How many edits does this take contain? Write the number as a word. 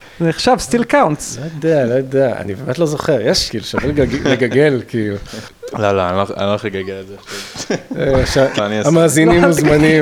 two